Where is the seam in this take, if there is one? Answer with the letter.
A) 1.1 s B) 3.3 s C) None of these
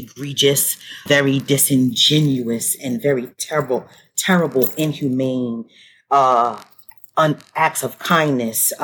A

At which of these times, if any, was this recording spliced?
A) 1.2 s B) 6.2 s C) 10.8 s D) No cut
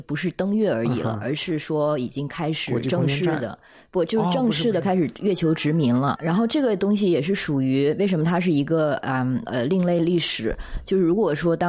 B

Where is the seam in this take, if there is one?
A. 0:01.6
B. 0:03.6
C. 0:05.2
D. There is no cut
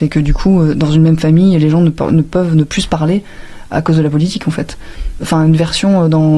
C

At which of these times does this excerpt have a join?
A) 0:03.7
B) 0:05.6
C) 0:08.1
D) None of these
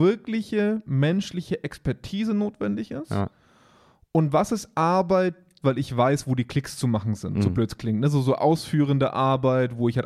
B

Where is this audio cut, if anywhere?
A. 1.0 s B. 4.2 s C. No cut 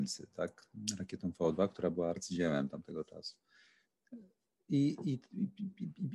C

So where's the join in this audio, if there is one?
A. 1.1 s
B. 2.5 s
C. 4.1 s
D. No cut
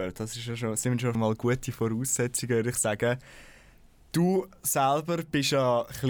A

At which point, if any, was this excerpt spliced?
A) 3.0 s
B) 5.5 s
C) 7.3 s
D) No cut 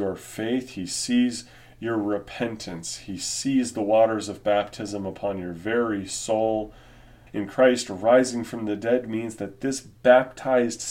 C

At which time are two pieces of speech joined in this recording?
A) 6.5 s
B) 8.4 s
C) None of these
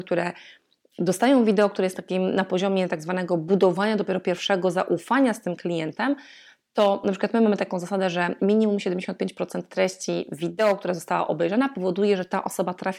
B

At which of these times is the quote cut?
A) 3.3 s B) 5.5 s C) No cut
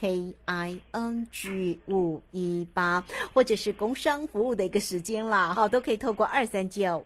B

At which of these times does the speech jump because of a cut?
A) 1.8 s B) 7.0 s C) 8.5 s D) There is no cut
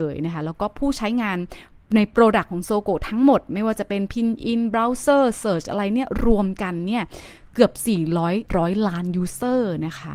C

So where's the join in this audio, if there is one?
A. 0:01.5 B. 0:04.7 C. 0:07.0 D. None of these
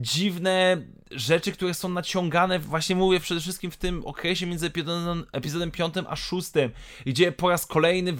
D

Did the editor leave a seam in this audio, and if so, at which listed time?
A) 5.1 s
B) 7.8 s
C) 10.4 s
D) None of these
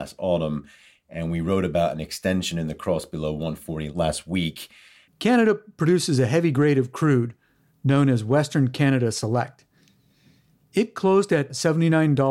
A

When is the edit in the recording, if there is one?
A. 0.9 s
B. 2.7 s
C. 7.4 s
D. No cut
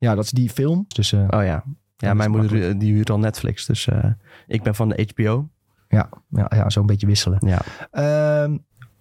A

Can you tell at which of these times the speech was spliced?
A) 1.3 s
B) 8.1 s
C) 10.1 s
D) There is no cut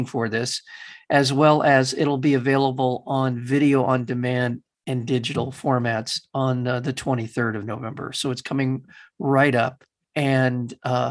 D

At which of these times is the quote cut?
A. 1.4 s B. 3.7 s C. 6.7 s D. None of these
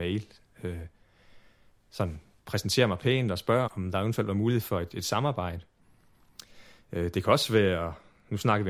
B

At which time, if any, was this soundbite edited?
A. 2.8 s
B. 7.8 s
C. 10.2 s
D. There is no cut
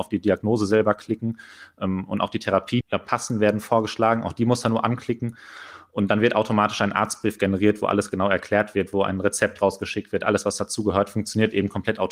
A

